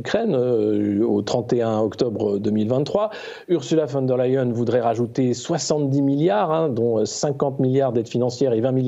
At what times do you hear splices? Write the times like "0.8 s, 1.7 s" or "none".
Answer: none